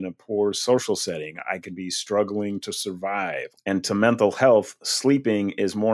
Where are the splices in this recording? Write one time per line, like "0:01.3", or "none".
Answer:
0:03.6

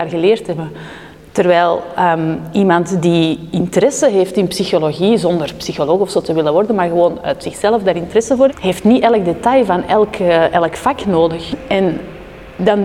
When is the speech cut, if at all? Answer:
0:08.5

